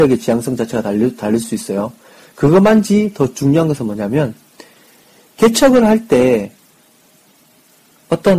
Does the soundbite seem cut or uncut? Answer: uncut